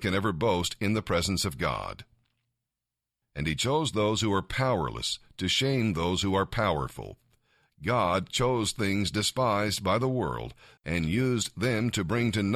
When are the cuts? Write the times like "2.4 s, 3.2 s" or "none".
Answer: 3.2 s, 10.8 s